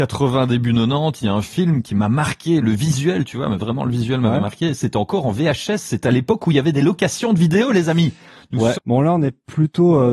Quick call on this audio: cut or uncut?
cut